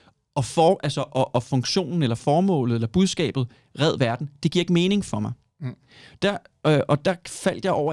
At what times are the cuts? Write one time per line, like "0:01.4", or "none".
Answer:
none